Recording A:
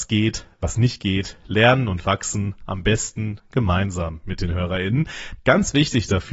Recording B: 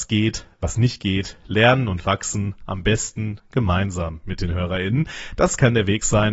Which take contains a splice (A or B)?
A